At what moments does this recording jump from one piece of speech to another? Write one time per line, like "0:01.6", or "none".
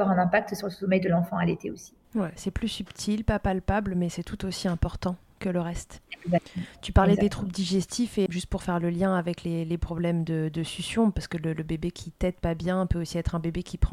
0:08.3